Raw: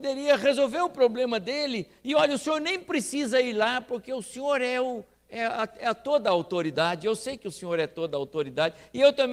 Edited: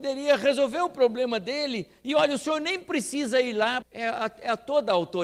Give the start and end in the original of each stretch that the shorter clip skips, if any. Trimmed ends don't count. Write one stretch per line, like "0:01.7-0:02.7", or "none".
0:03.8-0:05.2